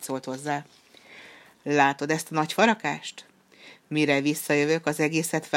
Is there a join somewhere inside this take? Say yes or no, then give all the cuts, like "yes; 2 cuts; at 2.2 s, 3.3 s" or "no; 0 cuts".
no; 0 cuts